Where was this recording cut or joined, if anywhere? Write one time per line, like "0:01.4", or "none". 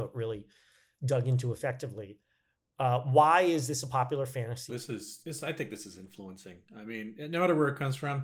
0:04.7

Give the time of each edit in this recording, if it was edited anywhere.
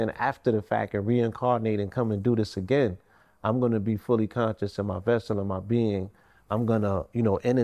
none

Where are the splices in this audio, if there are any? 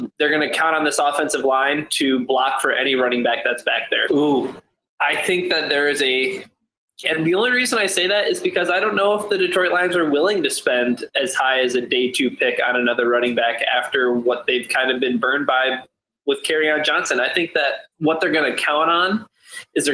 0:04.1
0:07.0
0:17.9

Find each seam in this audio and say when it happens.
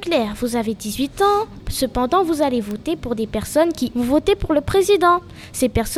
0:01.6
0:03.9

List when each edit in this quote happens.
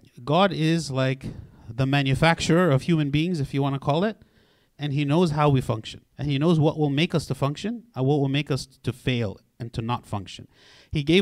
0:04.7
0:06.1

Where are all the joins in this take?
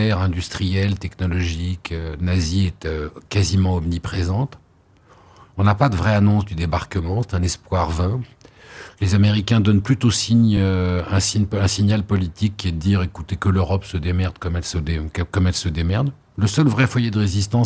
none

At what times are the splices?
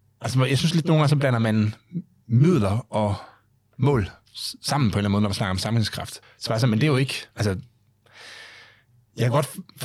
0:06.2
0:07.3

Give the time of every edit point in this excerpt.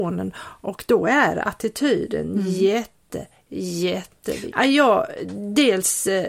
0:04.5

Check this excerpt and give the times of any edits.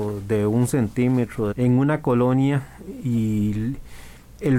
0:01.5

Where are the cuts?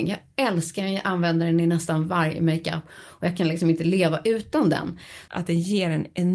0:05.3

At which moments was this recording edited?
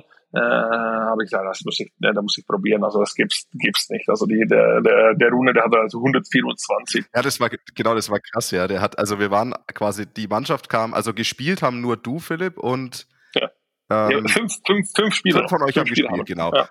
none

